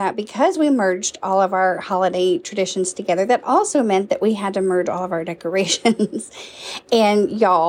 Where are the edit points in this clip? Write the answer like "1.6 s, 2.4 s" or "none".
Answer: none